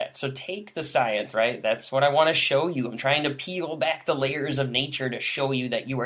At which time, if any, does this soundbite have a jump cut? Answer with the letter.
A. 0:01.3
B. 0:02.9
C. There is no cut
A